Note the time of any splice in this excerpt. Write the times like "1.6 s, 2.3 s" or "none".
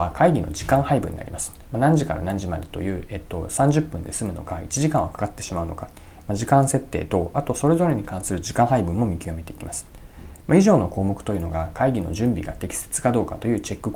none